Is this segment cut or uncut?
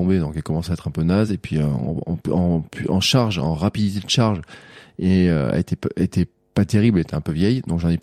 uncut